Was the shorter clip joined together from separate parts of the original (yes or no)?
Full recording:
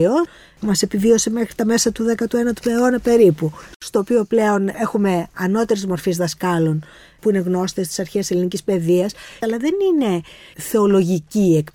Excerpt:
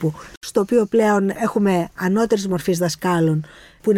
no